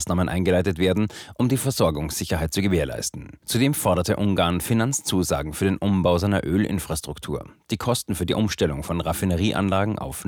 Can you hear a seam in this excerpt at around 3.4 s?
yes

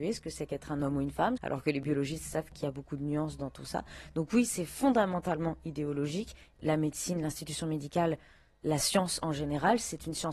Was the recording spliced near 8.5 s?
no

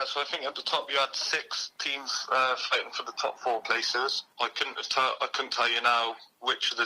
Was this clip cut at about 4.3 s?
yes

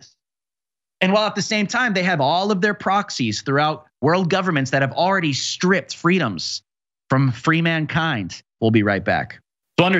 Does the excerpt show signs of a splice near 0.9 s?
no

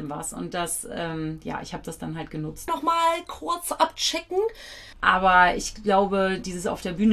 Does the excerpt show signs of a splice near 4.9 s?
yes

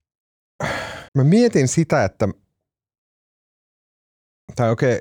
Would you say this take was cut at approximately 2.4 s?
no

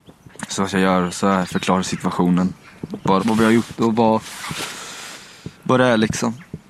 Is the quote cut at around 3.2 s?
yes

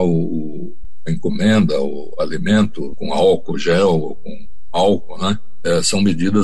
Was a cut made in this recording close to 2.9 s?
yes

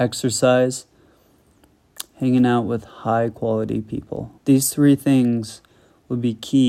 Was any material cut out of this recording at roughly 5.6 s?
no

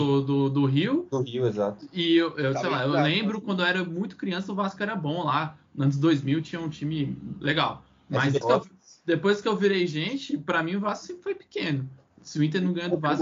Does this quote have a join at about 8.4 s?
yes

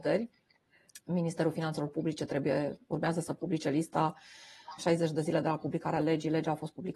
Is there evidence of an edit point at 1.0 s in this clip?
no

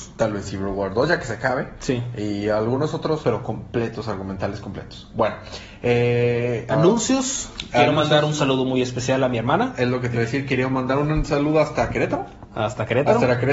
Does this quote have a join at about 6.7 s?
yes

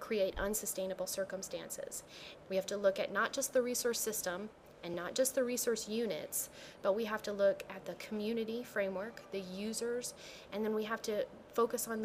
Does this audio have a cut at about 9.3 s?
no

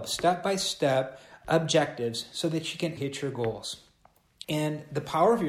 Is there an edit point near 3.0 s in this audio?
yes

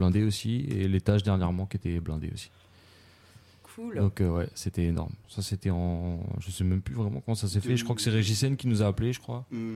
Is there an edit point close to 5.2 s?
yes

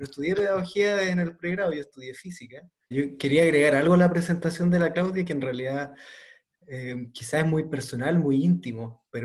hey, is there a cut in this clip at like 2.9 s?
yes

